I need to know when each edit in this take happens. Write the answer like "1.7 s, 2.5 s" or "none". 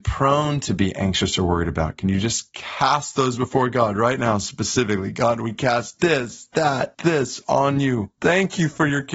8.2 s